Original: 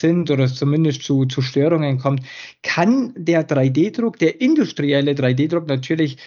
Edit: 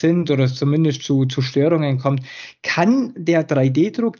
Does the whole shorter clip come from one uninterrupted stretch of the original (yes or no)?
yes